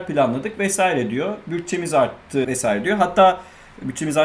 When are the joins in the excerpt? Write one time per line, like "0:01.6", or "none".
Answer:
0:02.4